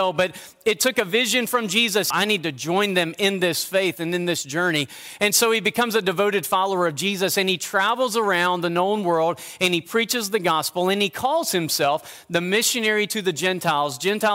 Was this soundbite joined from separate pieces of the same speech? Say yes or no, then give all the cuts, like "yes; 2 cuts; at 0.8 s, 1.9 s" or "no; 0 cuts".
yes; 1 cut; at 2.1 s